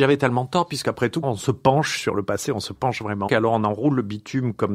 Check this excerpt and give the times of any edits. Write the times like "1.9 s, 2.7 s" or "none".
1.2 s, 3.3 s